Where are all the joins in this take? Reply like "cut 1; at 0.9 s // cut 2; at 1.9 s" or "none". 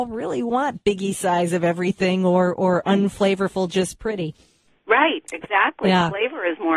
none